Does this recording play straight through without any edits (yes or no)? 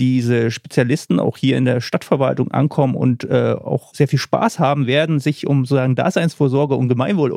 yes